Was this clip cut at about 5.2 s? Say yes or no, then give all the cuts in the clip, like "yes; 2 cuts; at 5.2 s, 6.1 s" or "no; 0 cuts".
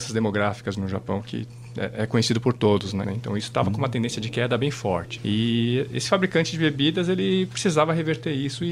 yes; 2 cuts; at 3.0 s, 5.2 s